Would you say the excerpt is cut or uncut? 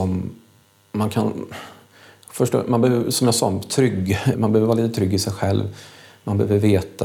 cut